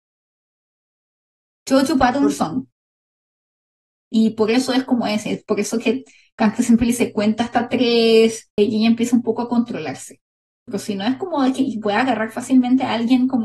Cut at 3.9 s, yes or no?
yes